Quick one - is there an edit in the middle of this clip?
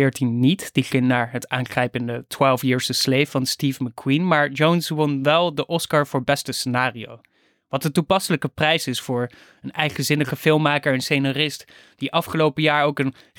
no; 0 cuts

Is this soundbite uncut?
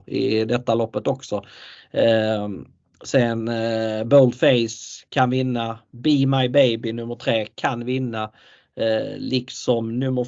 yes; 0 cuts

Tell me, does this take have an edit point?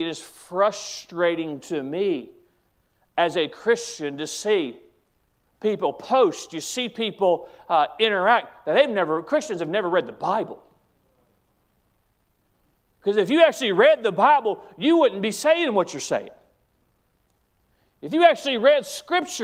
yes; 1 cut; at 5.4 s

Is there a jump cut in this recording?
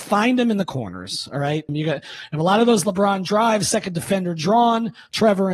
yes; 1 cut; at 1.7 s

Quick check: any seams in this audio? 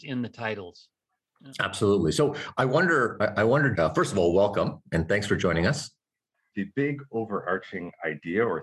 yes; 2 cuts; at 3.7 s, 6.5 s

